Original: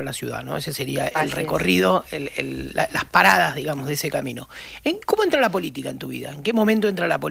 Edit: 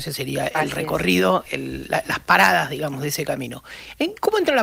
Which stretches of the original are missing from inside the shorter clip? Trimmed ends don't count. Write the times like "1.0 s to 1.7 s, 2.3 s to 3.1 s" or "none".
2.1 s to 2.3 s